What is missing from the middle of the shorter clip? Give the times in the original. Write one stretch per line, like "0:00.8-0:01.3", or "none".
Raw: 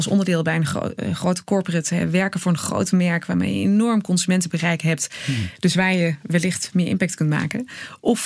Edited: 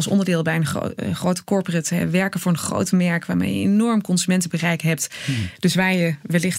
none